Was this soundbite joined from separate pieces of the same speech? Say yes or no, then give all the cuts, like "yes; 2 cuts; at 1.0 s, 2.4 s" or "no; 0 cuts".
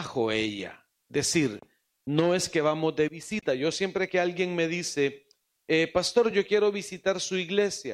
no; 0 cuts